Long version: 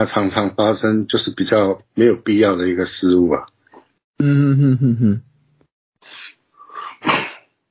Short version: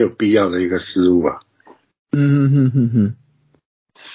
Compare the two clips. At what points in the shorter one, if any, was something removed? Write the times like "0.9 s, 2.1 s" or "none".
none